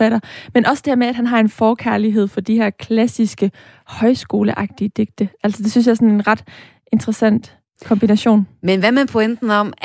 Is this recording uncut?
yes; 0 cuts

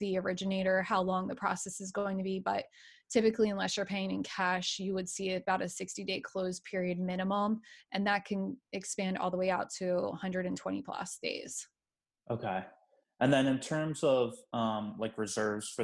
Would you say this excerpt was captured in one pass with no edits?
yes; 0 cuts

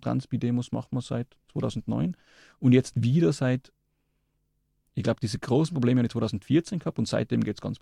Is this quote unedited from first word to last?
yes; 0 cuts

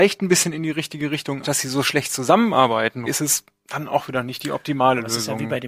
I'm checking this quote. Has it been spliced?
yes; 2 cuts; at 1.4 s, 3.1 s

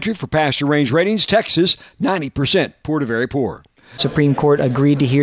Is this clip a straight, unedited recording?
no; 1 cut; at 4.0 s

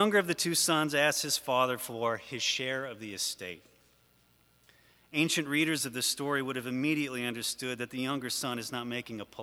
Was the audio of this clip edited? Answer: no; 0 cuts

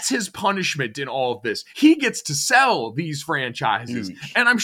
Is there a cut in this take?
yes; 1 cut; at 1.7 s

